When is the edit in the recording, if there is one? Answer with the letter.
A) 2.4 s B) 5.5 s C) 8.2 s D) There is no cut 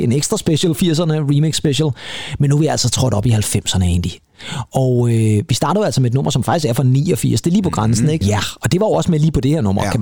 C